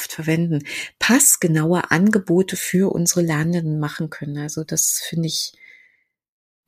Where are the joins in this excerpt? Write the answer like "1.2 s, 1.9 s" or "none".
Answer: none